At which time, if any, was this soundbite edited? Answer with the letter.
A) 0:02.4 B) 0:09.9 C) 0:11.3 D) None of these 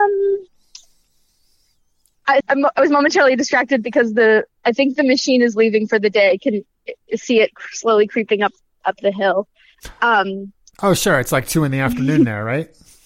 A